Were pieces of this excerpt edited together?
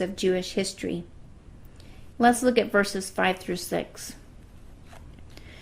yes; 1 cut; at 2.1 s

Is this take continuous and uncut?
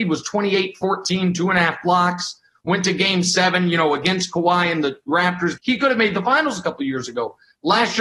no; 1 cut; at 5.6 s

